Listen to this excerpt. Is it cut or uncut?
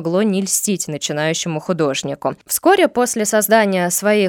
uncut